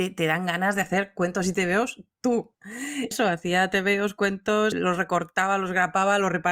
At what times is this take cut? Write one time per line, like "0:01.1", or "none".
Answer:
0:03.1
0:04.7